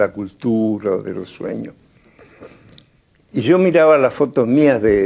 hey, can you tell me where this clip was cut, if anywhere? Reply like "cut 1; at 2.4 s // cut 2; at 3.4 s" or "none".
none